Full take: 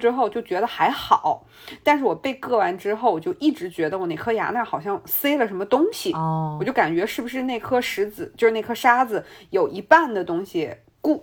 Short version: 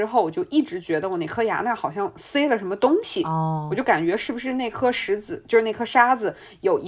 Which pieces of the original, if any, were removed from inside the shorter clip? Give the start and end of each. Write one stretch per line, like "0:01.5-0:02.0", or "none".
none